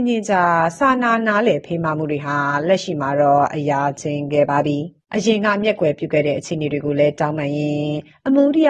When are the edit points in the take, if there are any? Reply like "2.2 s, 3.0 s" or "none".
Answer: 5.1 s